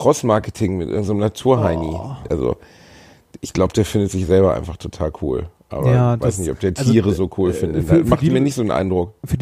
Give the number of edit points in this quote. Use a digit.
1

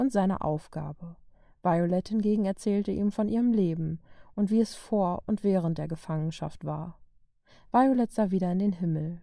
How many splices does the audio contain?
0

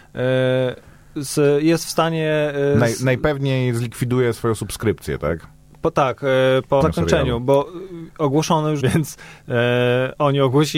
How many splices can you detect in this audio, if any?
2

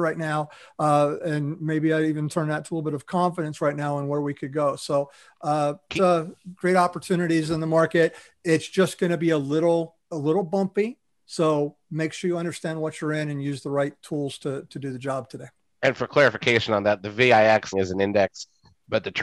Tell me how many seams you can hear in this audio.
3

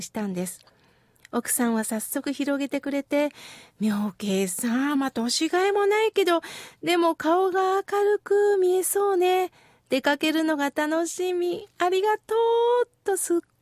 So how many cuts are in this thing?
0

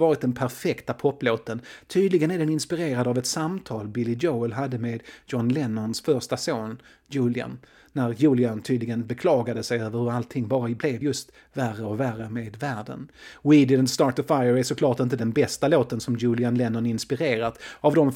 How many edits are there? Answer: 0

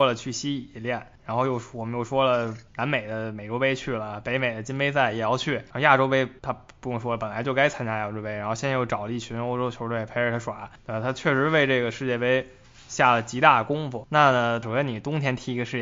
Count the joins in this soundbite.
1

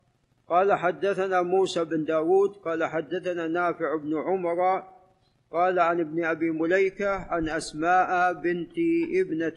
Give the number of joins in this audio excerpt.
0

